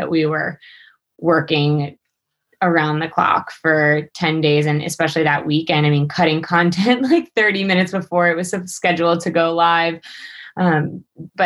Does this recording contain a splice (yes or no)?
no